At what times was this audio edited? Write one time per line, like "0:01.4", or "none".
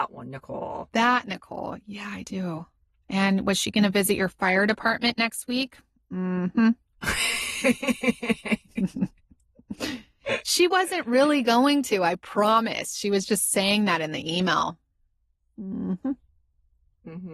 none